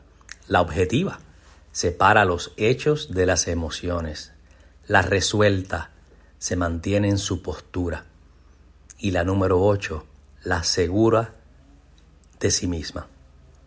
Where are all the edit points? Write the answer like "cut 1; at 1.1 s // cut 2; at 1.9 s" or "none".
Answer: none